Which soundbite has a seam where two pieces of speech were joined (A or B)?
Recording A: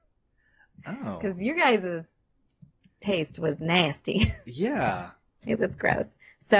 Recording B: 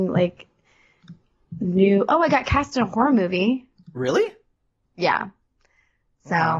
B